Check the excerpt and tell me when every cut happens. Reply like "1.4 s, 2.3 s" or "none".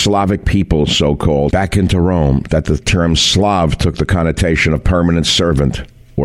1.5 s